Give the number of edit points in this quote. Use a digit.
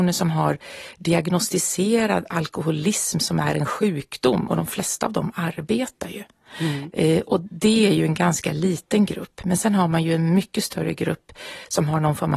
0